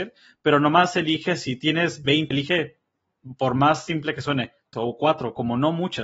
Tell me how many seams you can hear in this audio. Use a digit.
2